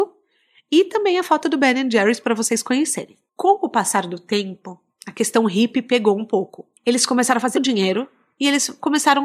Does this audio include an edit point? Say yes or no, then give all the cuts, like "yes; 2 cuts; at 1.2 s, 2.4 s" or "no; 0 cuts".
yes; 1 cut; at 7.5 s